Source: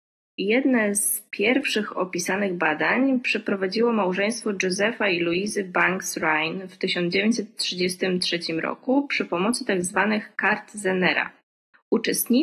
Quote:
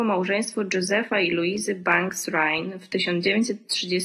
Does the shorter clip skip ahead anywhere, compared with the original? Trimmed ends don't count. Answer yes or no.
no